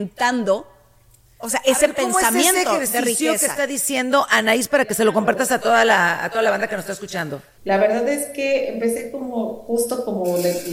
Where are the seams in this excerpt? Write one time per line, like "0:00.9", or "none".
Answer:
0:07.6